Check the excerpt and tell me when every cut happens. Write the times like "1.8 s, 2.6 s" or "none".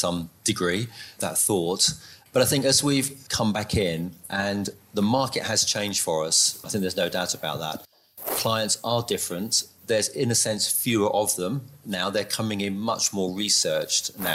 1.2 s